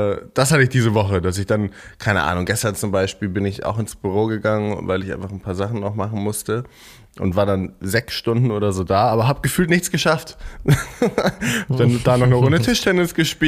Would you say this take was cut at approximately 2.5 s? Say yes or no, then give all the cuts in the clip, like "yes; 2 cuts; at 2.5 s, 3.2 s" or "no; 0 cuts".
no; 0 cuts